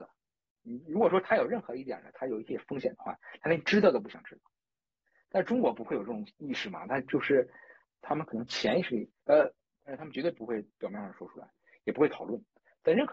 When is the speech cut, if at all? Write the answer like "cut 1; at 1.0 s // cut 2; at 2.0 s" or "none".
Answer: cut 1; at 7.8 s // cut 2; at 9.7 s